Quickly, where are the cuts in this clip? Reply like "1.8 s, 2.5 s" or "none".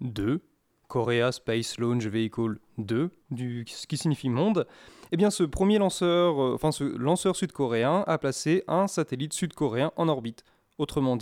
3.2 s